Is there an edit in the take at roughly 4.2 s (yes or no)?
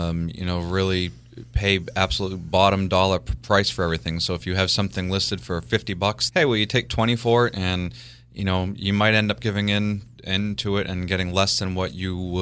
no